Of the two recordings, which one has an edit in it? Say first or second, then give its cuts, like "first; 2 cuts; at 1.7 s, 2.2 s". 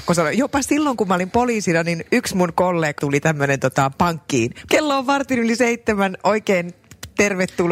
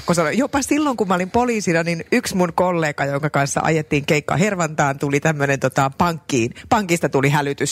first; 2 cuts; at 3.0 s, 4.7 s